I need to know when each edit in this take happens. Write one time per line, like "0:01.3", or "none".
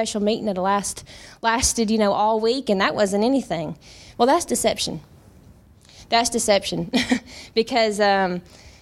0:04.1